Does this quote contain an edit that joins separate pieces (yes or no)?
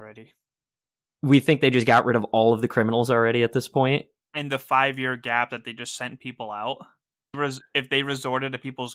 yes